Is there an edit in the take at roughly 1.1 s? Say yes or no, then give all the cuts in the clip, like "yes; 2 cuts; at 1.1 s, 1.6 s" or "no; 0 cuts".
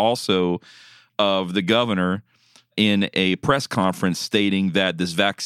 no; 0 cuts